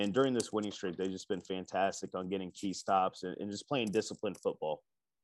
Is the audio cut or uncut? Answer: uncut